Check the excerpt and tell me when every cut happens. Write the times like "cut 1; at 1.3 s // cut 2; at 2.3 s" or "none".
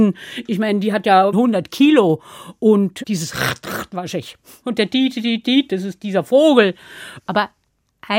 cut 1; at 1.3 s // cut 2; at 4.6 s // cut 3; at 7.2 s

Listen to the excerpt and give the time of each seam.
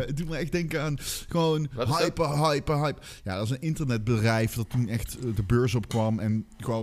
cut 1; at 2.3 s

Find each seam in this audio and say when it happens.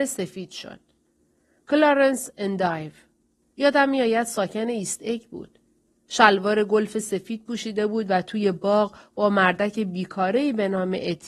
cut 1; at 5.9 s

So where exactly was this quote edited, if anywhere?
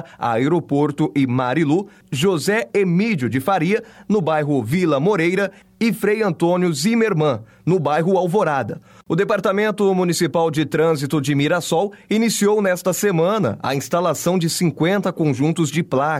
cut 1; at 9.0 s

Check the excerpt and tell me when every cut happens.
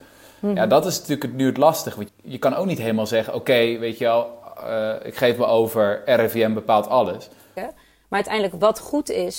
cut 1; at 2.1 s // cut 2; at 7.6 s

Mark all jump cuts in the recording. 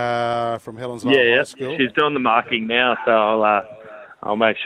none

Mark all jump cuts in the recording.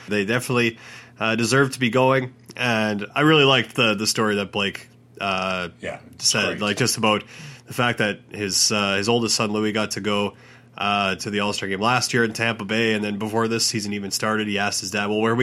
none

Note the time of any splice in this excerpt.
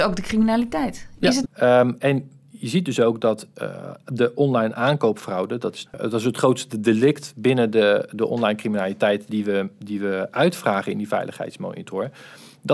cut 1; at 1.4 s // cut 2; at 5.9 s

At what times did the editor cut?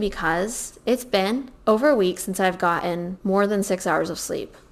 none

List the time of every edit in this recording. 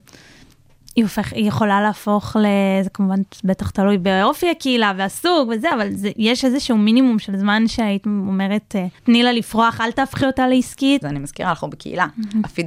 cut 1; at 9.0 s // cut 2; at 11.0 s

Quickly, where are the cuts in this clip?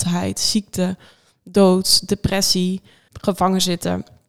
cut 1; at 3.1 s

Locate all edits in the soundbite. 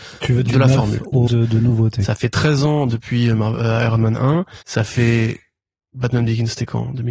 cut 1; at 1.3 s // cut 2; at 4.6 s

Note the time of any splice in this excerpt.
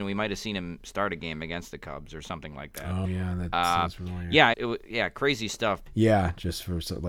cut 1; at 3.0 s // cut 2; at 4.5 s // cut 3; at 5.9 s

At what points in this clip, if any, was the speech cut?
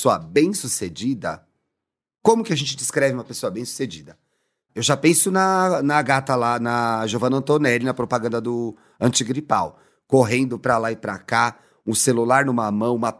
cut 1; at 4.7 s

